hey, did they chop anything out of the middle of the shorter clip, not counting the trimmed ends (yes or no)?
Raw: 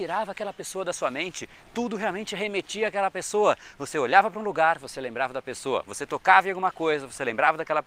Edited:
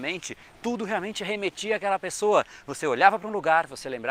no